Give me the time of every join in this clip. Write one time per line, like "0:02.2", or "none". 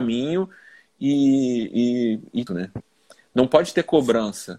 0:02.5